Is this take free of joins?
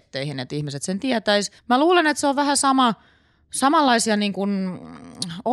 no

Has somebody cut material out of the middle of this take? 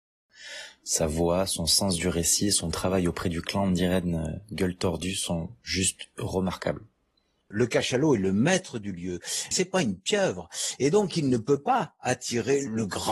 yes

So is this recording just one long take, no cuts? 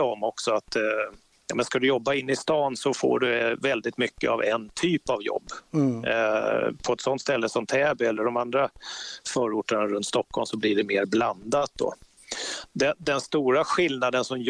yes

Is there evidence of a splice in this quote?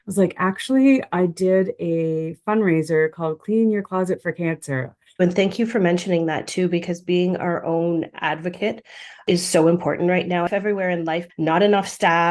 yes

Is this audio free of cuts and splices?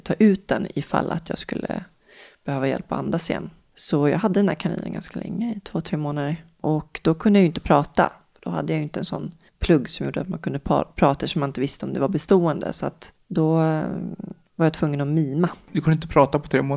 yes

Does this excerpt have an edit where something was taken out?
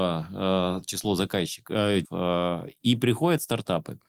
yes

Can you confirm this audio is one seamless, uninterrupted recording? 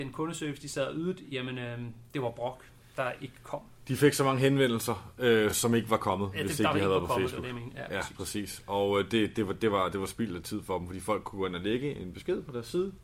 yes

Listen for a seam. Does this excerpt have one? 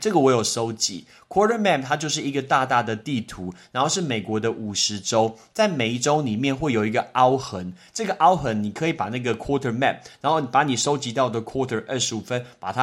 no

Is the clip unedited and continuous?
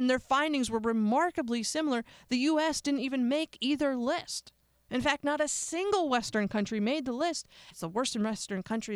no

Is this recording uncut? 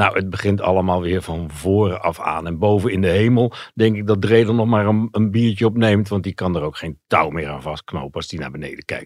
yes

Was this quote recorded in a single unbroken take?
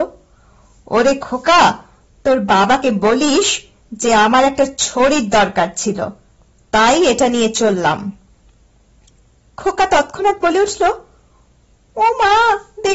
yes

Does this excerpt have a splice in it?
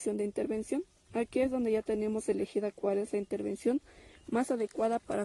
no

